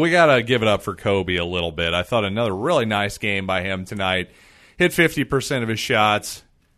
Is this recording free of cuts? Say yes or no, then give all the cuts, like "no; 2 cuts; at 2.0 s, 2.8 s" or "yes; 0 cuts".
yes; 0 cuts